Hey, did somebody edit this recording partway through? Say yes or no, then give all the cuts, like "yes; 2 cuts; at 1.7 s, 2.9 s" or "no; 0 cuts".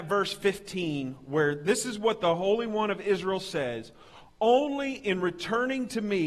no; 0 cuts